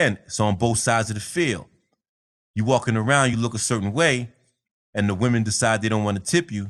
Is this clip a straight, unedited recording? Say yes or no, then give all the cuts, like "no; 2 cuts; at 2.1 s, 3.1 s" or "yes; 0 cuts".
yes; 0 cuts